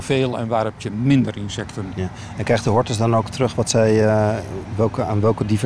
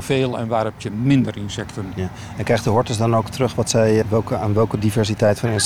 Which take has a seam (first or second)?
second